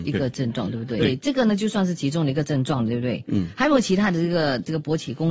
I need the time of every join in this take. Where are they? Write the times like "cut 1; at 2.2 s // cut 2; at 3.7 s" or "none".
cut 1; at 1.0 s

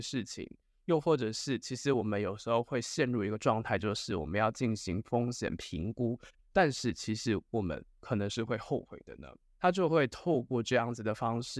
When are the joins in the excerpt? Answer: cut 1; at 6.4 s // cut 2; at 9.5 s

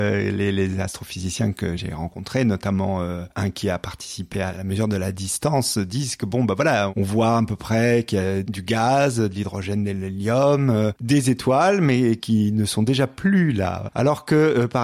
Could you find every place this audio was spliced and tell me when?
cut 1; at 13.9 s

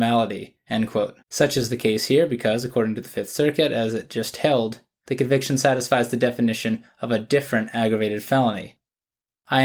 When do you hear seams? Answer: cut 1; at 1.2 s

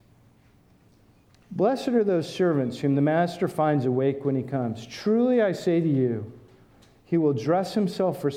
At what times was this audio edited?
none

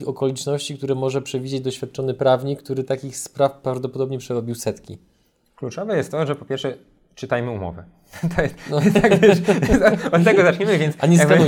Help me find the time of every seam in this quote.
none

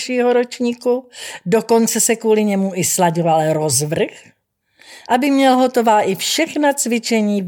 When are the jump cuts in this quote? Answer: cut 1; at 5.0 s

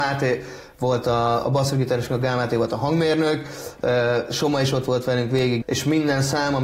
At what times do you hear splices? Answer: cut 1; at 1.4 s // cut 2; at 5.6 s

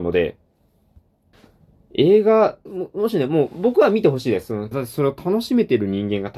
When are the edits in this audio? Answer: cut 1; at 2.7 s // cut 2; at 4.7 s

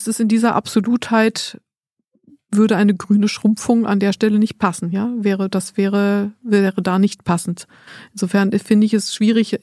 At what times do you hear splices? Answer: none

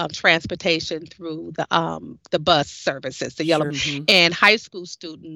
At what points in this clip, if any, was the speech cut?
cut 1; at 3.7 s

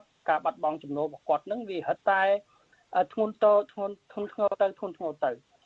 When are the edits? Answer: cut 1; at 2.0 s

